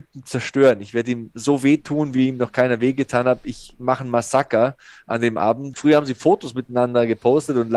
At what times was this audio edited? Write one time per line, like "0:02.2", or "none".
0:05.7

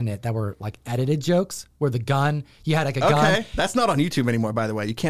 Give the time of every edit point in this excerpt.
none

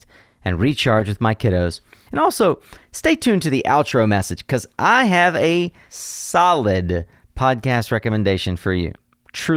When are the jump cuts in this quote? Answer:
0:02.1

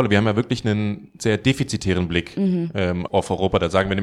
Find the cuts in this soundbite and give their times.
0:03.1

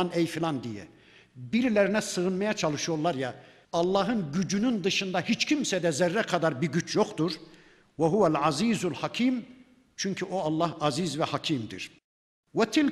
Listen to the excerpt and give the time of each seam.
0:03.6

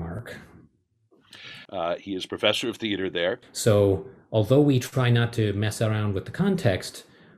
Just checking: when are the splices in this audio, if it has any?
0:01.7
0:03.4

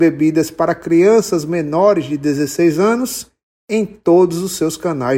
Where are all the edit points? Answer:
none

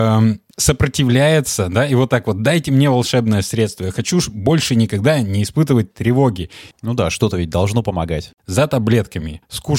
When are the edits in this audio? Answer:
0:06.7
0:08.4

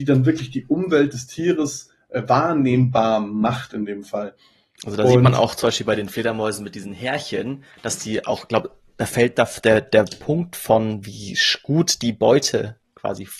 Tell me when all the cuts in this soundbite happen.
none

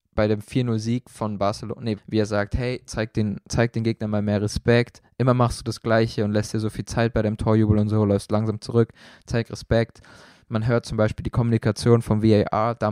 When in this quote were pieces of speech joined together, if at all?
0:02.0

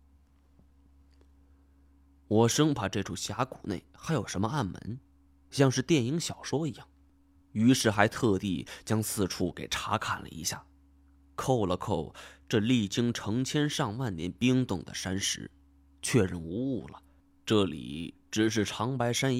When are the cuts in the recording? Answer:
none

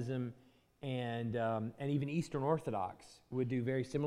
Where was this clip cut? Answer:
none

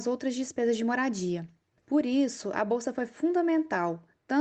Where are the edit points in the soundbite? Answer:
0:01.8

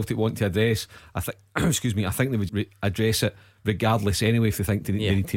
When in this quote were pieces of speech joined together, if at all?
0:02.5

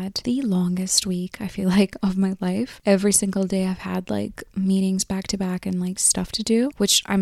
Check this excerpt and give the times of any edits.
none

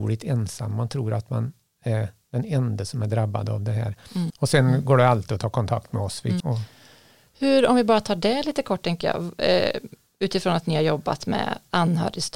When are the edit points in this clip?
0:04.3
0:06.4

